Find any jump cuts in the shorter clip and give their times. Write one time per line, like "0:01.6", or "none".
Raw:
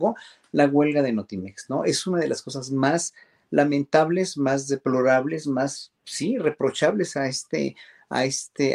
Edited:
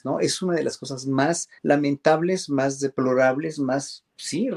0:01.6